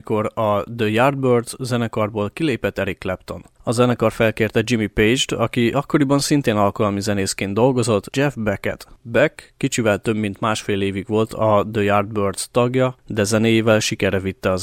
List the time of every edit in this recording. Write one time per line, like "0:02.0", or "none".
0:03.6
0:08.1